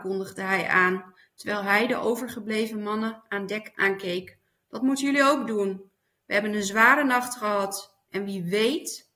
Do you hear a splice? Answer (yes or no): no